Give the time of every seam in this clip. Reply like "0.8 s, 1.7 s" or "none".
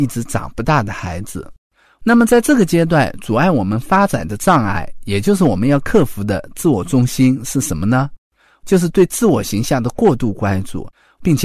none